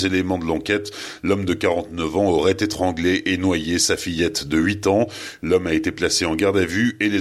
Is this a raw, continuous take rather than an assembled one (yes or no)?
no